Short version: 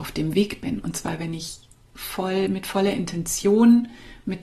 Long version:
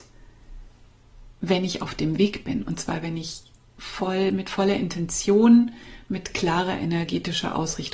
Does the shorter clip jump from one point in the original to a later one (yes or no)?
no